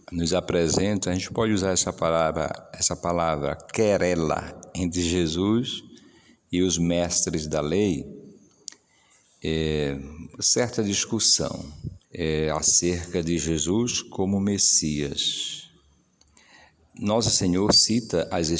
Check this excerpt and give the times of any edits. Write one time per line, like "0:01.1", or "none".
0:12.0